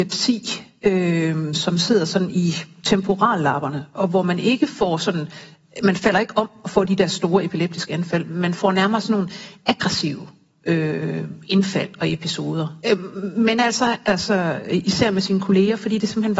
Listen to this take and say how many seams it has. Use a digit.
2